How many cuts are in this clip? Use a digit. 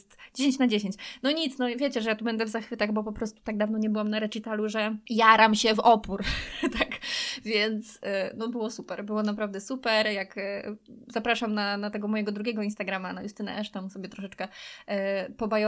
0